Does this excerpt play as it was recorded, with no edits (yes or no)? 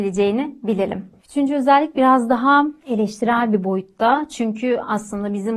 no